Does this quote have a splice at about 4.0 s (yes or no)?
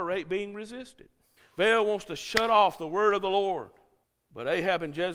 no